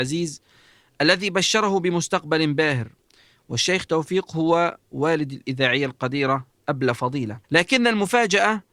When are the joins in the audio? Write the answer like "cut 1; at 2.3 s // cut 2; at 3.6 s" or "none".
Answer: cut 1; at 7.4 s